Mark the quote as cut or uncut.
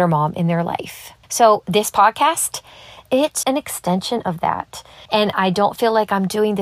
cut